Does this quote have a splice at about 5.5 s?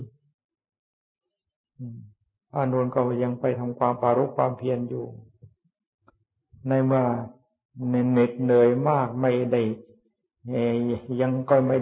no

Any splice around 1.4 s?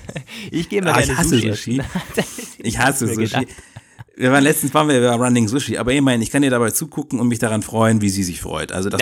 yes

